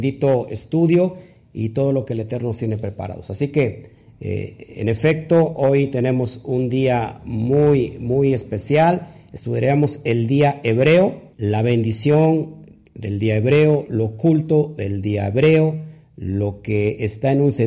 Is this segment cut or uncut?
cut